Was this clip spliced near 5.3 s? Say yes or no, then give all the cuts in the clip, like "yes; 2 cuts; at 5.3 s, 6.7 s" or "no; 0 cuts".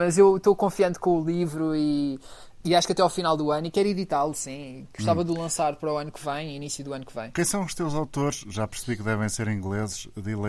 no; 1 cut; at 2.6 s